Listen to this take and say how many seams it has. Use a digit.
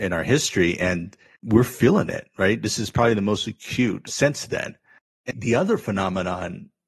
1